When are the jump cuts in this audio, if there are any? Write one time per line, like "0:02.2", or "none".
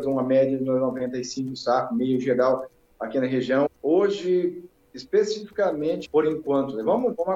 0:03.7
0:06.0